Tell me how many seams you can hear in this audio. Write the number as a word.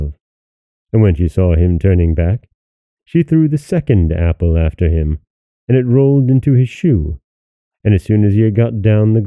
zero